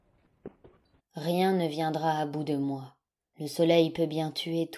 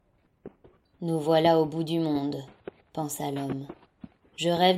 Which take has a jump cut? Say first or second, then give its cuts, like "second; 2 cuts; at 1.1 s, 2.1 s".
first; 1 cut; at 1.0 s